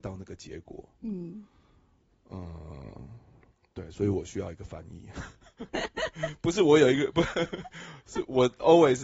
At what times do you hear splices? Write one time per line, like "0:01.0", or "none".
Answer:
0:05.7